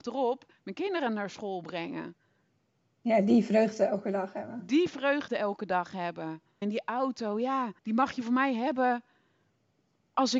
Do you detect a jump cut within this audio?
yes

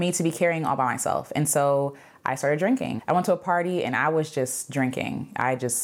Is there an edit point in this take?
yes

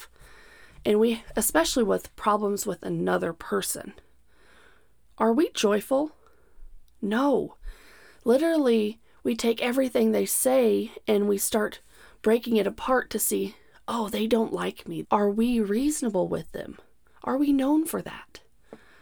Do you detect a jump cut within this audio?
yes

